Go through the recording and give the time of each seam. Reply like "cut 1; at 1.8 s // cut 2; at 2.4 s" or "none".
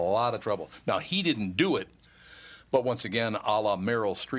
none

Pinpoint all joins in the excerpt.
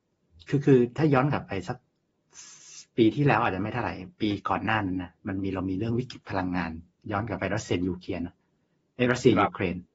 none

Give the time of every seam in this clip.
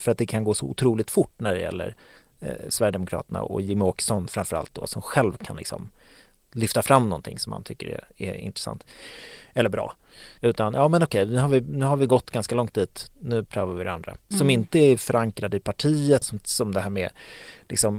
cut 1; at 10.4 s // cut 2; at 14.3 s // cut 3; at 16.2 s

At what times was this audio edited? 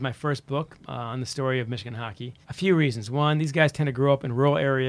cut 1; at 2.4 s

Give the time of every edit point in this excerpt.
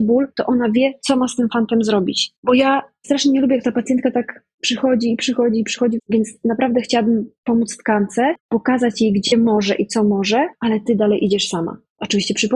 cut 1; at 2.4 s // cut 2; at 6.0 s

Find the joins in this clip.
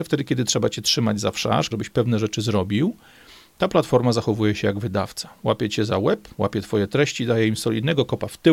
cut 1; at 1.7 s

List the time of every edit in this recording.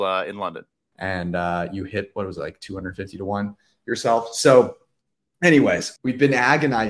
cut 1; at 0.9 s // cut 2; at 6.0 s

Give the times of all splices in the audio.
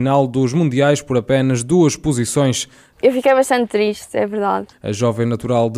cut 1; at 2.9 s // cut 2; at 4.7 s

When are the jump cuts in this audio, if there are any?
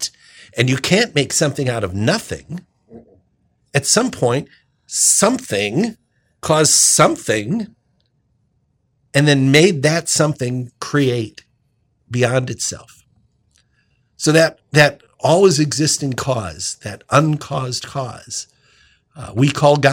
none

